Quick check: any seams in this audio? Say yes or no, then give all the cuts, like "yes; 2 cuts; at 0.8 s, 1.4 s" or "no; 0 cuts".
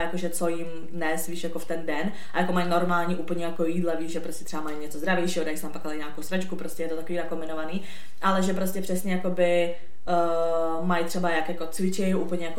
no; 0 cuts